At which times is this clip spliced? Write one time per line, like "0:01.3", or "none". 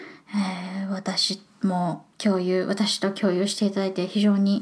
0:02.1